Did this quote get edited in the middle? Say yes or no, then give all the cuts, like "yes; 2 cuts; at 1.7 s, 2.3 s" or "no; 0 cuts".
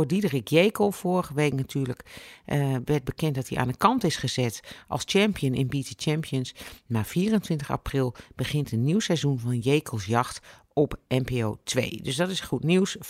no; 0 cuts